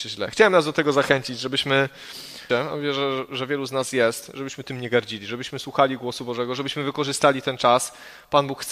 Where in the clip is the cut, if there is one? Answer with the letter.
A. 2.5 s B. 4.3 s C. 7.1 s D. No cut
A